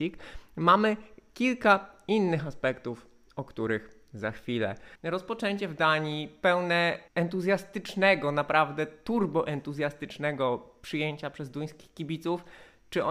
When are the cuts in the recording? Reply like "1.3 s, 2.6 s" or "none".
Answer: 5.0 s, 7.1 s